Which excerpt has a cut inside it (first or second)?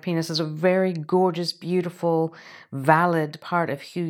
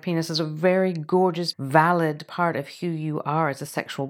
second